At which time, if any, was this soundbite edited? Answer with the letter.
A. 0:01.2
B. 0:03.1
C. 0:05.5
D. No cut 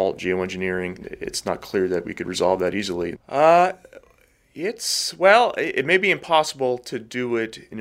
B